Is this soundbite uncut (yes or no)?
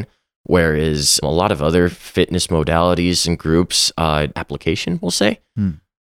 no